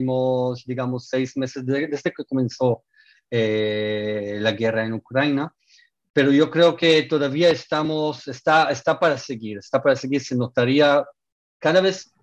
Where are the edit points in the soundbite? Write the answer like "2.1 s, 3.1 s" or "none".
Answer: none